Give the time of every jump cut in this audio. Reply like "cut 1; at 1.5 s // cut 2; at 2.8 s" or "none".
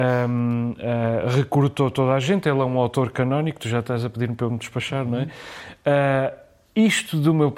none